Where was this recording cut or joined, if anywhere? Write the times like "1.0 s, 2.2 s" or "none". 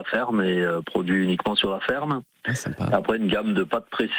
none